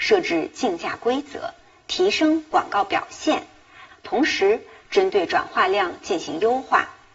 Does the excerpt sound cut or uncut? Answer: cut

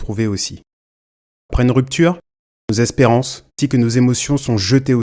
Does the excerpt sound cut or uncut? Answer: cut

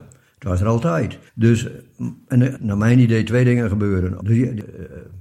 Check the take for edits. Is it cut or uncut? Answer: cut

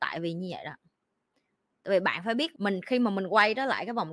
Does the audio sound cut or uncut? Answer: cut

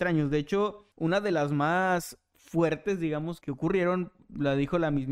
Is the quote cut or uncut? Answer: cut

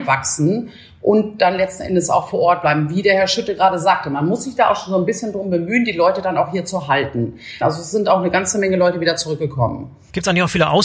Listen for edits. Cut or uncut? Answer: cut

